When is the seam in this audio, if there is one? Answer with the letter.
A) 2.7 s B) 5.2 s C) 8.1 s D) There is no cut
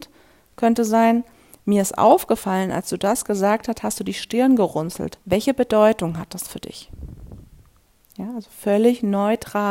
B